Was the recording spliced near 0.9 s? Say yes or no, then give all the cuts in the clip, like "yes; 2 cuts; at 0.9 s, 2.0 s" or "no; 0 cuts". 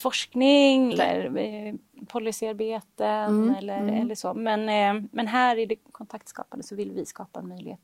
yes; 1 cut; at 0.9 s